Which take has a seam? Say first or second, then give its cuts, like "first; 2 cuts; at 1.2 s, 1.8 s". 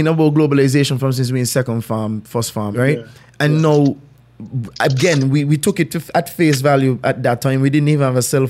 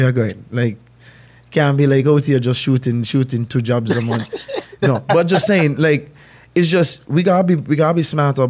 first; 1 cut; at 2.7 s